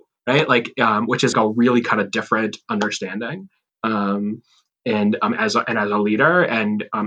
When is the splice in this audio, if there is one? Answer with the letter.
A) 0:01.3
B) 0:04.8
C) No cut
A